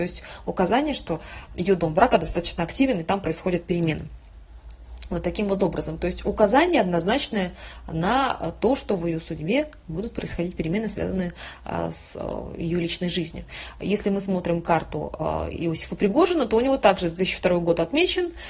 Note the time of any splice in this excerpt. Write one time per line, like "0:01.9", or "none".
none